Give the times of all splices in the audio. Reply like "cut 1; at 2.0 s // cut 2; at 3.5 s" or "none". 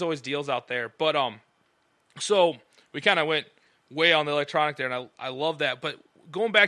none